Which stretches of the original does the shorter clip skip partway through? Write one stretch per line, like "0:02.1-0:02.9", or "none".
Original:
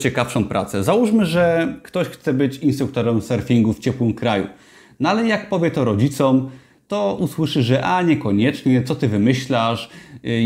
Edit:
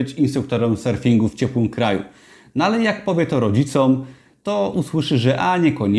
none